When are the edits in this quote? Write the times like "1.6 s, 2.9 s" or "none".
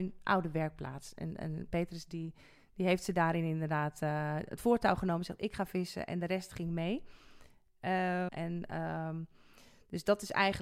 8.3 s